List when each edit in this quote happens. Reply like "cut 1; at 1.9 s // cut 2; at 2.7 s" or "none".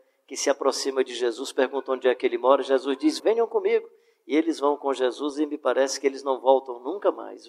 cut 1; at 3.2 s

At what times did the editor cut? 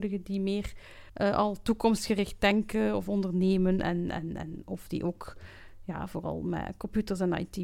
cut 1; at 1.1 s

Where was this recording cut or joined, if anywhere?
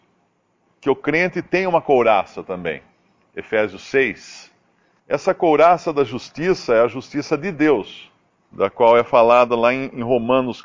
cut 1; at 5.0 s // cut 2; at 8.4 s

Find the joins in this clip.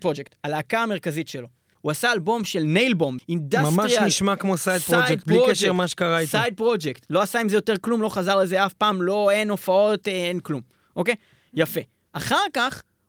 cut 1; at 3.2 s

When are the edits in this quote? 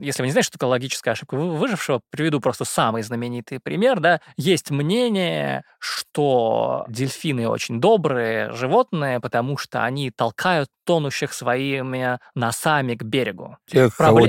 none

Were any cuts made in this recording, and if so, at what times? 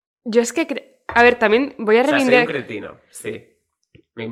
none

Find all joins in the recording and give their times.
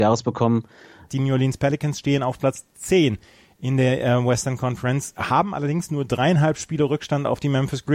cut 1; at 1.1 s

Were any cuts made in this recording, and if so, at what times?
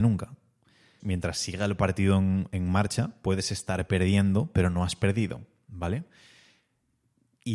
cut 1; at 1.0 s

